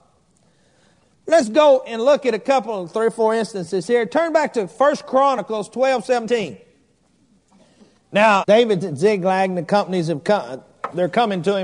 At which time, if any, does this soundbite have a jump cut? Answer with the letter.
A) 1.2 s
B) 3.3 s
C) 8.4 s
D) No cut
C